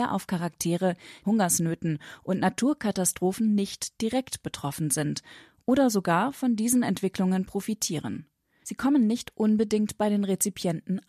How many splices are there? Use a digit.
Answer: 2